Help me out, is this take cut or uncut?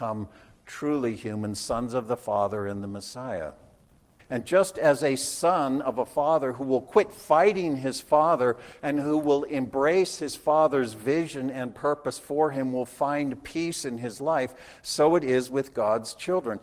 cut